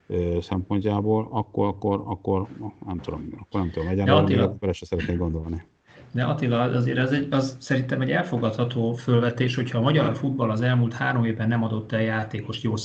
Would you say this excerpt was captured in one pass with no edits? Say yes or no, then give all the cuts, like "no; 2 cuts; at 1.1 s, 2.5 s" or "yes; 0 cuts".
yes; 0 cuts